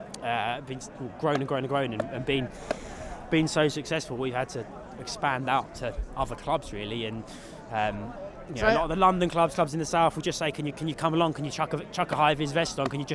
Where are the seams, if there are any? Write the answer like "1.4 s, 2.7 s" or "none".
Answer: none